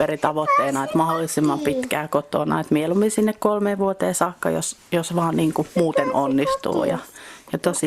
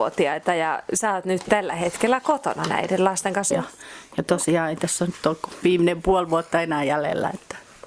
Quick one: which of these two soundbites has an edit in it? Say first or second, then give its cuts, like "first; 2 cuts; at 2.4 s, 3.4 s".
second; 1 cut; at 3.5 s